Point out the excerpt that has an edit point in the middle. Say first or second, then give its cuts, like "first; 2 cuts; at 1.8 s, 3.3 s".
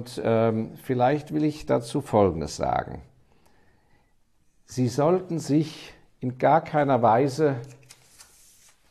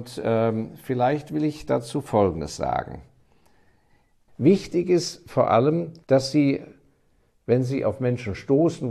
second; 2 cuts; at 4.3 s, 6.0 s